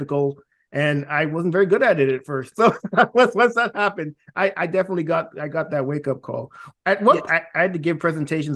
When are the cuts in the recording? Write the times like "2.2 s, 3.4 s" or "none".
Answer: 2.5 s, 4.5 s, 7.3 s